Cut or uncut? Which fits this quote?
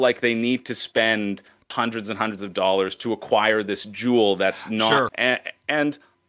cut